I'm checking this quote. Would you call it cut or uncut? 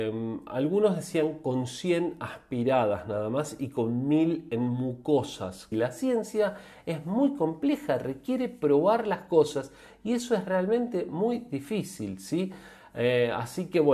cut